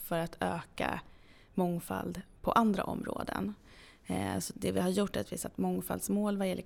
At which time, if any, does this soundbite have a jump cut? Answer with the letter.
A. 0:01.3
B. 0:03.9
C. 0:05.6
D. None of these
D